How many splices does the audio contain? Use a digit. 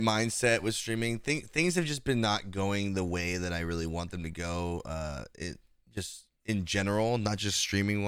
0